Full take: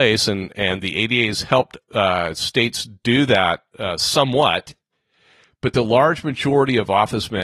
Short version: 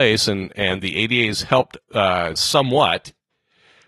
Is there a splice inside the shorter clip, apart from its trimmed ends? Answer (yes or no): yes